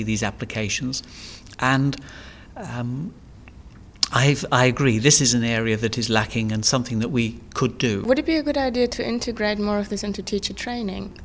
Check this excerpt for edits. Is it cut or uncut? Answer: uncut